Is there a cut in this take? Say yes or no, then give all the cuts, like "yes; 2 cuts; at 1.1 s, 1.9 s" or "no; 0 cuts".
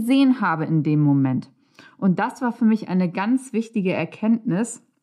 no; 0 cuts